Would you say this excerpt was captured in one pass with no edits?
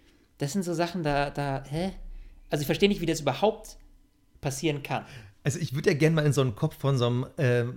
yes; 0 cuts

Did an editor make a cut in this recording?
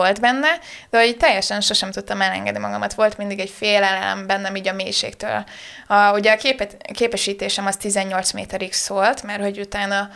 no; 0 cuts

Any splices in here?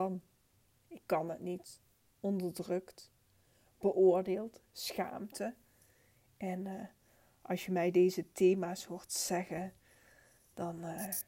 no; 0 cuts

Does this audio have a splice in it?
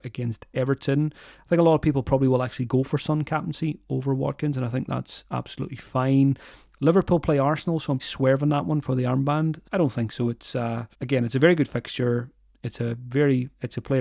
yes; 3 cuts; at 8.0 s, 9.6 s, 10.9 s

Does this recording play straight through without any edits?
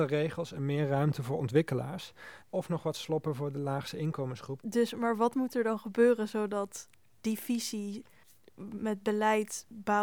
no; 2 cuts; at 2.4 s, 4.6 s

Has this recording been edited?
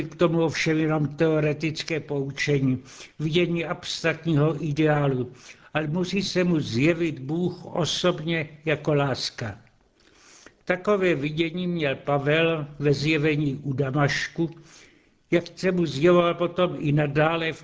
no; 0 cuts

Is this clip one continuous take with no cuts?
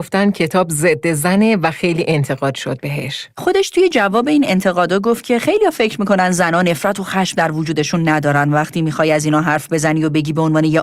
yes; 0 cuts

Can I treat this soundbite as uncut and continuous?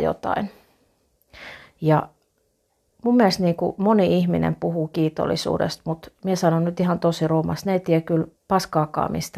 no; 1 cut; at 8.4 s

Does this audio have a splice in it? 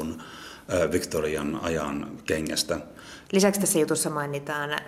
yes; 1 cut; at 3.2 s

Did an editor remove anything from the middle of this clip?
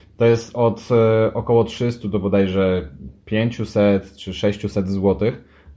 no; 0 cuts

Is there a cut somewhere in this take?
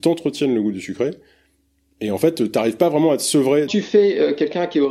yes; 1 cut; at 3.7 s

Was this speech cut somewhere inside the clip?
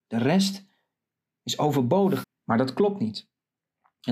yes; 1 cut; at 2.2 s

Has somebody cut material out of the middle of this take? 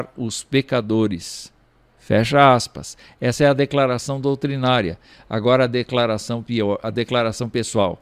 yes; 1 cut; at 6.8 s

